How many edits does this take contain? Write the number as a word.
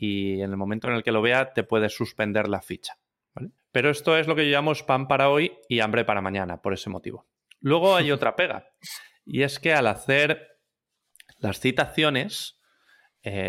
one